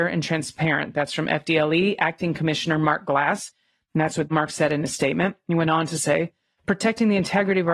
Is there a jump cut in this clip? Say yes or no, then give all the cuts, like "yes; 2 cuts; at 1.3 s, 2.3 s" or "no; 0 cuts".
no; 0 cuts